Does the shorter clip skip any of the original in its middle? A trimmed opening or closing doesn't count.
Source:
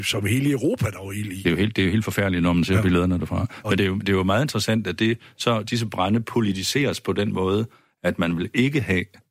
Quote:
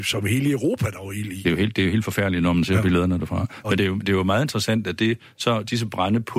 no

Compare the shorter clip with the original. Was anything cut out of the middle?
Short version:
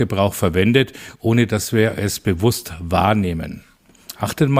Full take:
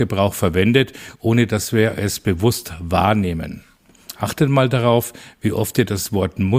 no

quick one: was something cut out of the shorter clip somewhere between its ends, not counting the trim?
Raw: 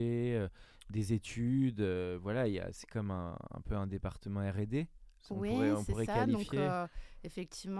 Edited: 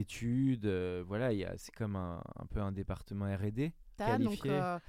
yes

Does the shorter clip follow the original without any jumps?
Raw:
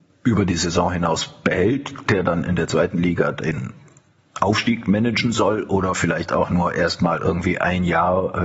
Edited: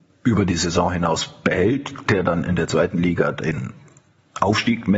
yes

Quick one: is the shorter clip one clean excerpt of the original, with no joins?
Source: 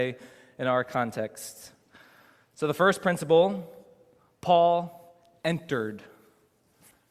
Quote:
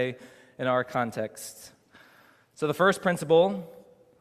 yes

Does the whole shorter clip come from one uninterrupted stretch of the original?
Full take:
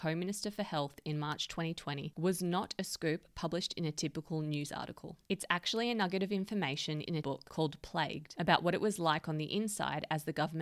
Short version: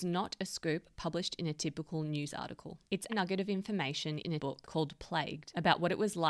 no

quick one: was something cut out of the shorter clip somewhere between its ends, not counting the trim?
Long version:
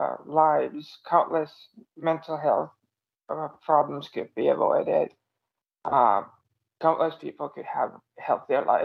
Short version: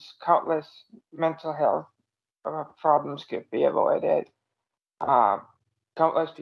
no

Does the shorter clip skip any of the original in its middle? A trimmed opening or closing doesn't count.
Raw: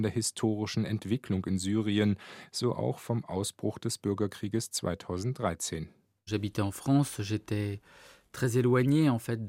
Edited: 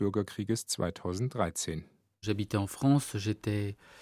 no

